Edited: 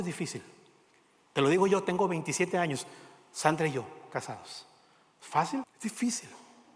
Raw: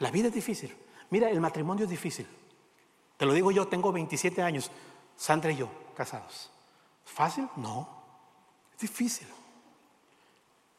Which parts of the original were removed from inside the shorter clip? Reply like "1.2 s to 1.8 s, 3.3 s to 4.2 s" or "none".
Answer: 7.5 s to 8.6 s